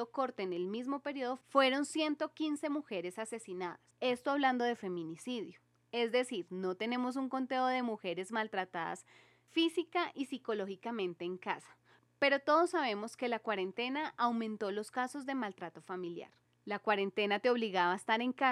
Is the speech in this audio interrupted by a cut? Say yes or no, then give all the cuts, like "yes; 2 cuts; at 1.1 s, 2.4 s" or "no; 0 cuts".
no; 0 cuts